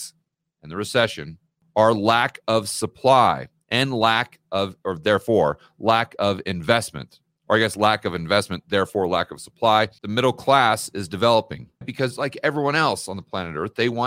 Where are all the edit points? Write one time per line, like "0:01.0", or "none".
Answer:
0:10.0
0:11.8